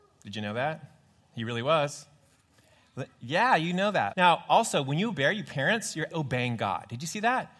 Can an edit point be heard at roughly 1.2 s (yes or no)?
no